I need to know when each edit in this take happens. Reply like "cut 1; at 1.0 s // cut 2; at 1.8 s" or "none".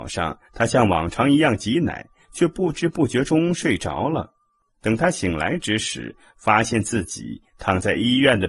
none